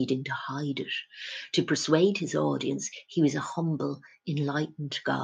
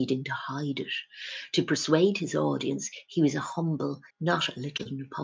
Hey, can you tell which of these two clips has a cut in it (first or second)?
second